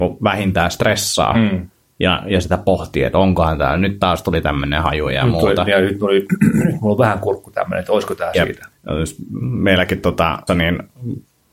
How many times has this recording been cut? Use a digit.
2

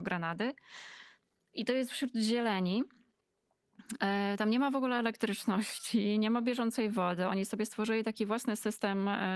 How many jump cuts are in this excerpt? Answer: 0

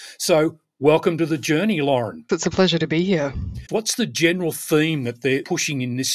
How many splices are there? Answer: 2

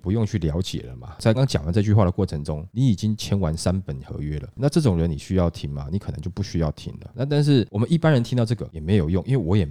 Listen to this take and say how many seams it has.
1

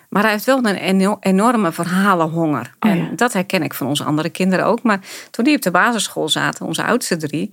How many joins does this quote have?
1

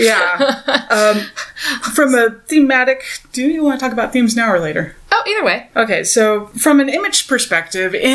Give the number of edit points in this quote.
0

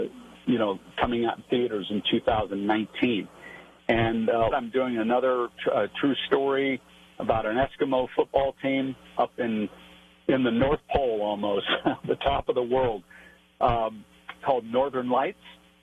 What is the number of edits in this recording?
1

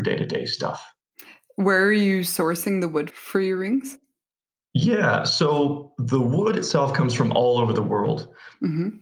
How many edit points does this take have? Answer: 1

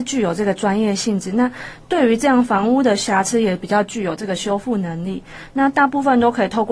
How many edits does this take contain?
0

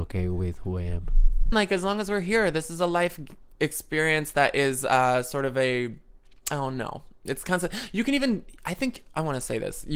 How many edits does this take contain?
1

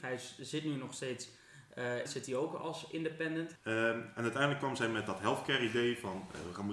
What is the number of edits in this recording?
2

